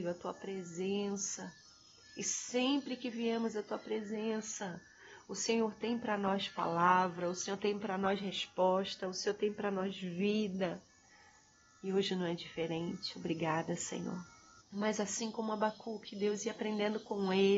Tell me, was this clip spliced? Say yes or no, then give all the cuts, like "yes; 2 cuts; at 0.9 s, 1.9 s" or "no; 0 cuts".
yes; 1 cut; at 14.6 s